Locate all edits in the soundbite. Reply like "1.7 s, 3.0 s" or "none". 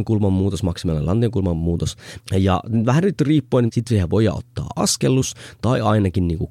2.2 s, 3.7 s

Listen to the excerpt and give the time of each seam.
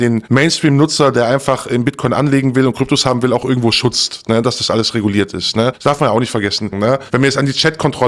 6.7 s

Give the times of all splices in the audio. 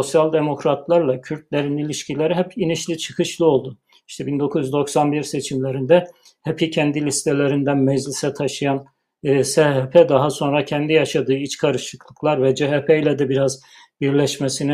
none

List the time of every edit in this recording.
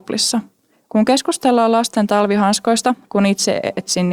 3.0 s

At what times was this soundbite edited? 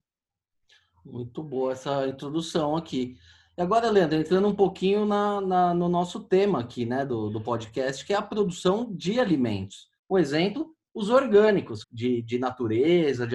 10.0 s, 11.8 s

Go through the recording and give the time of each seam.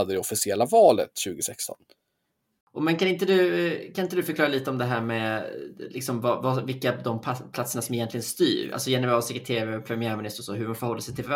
2.6 s

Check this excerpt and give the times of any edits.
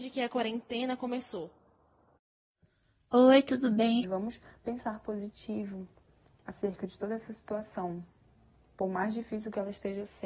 4.0 s

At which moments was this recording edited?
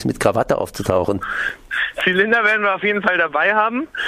none

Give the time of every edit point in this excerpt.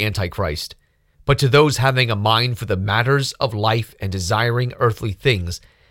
1.1 s

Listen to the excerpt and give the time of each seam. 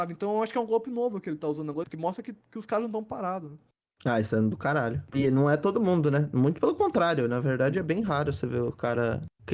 1.8 s

